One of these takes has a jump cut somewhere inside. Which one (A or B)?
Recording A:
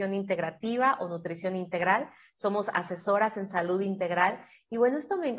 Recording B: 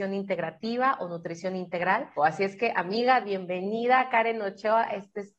B